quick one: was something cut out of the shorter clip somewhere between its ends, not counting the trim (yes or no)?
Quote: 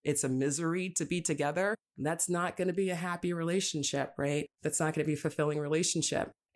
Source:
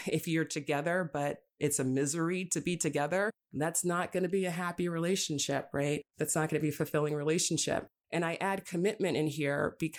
no